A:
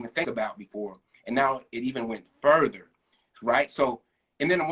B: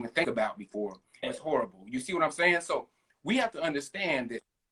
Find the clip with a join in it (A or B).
B